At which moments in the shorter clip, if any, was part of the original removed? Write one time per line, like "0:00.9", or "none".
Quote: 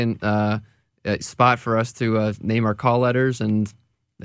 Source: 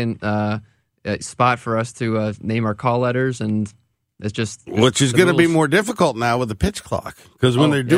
none